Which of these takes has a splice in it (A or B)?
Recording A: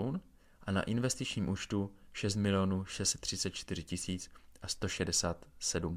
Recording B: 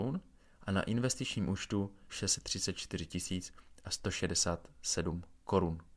B